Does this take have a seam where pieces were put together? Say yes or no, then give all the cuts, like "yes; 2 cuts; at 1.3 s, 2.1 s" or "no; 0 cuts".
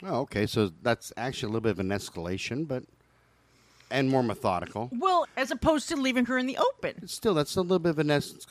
yes; 1 cut; at 5.2 s